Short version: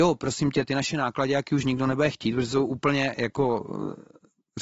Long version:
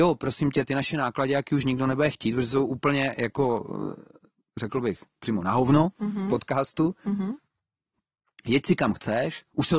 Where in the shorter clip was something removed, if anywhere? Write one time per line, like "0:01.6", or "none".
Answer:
none